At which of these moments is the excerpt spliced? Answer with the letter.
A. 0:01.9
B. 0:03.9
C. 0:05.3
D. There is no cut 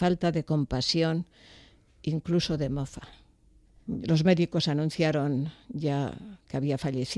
B